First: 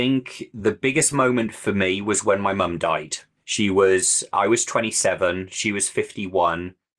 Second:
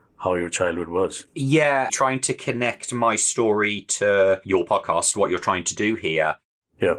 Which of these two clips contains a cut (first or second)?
second